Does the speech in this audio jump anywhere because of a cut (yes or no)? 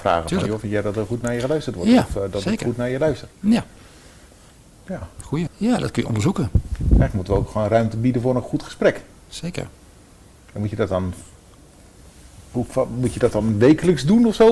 yes